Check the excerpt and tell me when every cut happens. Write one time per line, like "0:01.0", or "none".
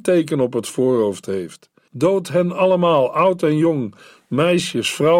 0:01.9